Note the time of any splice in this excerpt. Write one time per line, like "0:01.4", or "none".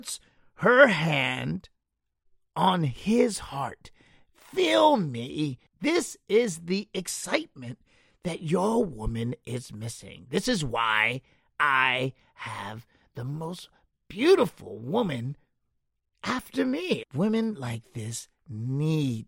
0:05.7
0:17.0